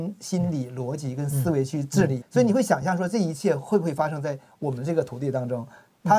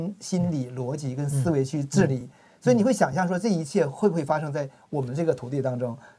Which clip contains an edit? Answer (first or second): first